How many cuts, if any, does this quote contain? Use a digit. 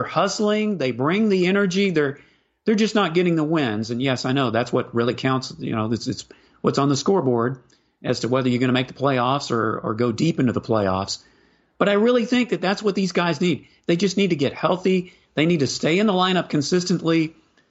0